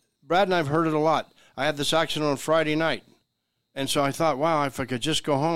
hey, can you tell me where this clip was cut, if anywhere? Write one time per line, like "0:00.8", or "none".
none